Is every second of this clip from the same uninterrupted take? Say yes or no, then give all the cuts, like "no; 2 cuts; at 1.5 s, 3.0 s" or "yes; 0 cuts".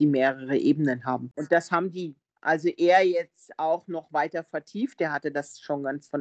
yes; 0 cuts